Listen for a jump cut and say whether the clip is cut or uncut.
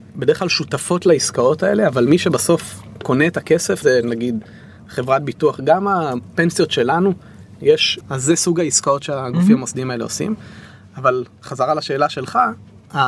cut